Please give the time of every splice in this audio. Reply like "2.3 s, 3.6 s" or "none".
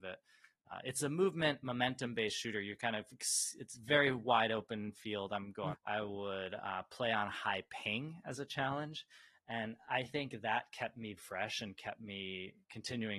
5.7 s, 11.2 s